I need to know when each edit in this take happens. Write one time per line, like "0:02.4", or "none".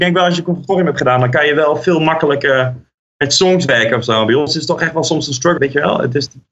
0:05.6